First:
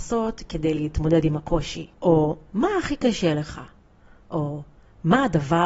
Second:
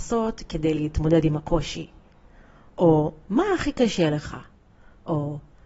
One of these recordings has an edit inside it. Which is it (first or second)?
first